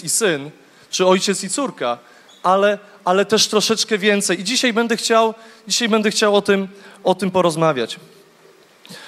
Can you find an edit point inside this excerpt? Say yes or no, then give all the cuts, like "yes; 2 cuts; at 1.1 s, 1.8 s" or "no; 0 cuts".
no; 0 cuts